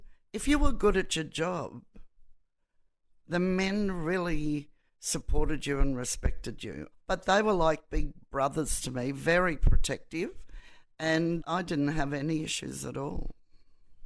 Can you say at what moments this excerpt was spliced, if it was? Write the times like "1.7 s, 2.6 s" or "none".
6.9 s, 11.4 s